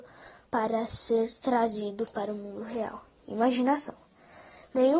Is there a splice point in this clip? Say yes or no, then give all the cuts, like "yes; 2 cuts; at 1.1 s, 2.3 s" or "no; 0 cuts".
no; 0 cuts